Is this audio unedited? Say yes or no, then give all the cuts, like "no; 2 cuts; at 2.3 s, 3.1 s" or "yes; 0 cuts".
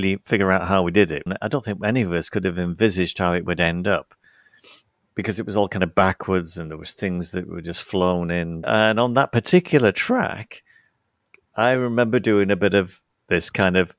no; 2 cuts; at 1.3 s, 8.6 s